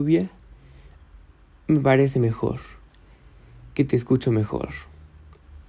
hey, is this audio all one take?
yes; 0 cuts

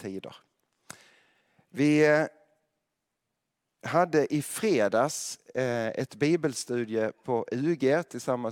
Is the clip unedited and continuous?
yes; 0 cuts

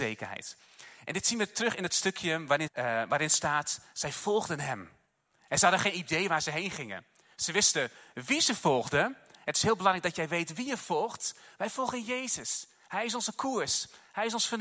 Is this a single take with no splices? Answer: no; 1 cut; at 2.7 s

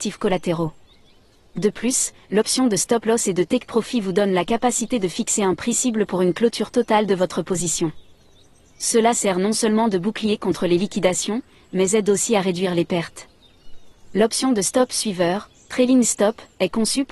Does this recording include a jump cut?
yes; 1 cut; at 1.5 s

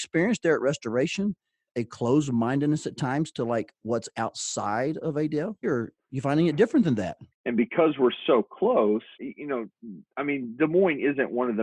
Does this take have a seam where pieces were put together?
yes; 3 cuts; at 5.6 s, 7.3 s, 9.2 s

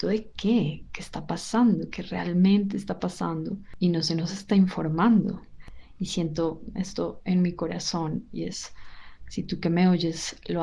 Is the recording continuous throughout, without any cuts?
yes; 0 cuts

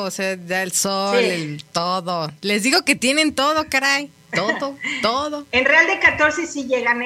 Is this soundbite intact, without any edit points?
yes; 0 cuts

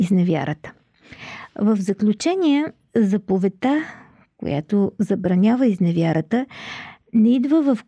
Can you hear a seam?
no; 0 cuts

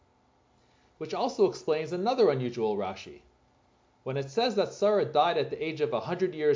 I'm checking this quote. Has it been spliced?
no; 0 cuts

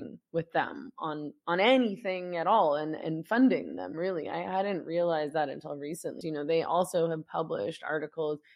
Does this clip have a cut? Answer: yes; 1 cut; at 6.2 s

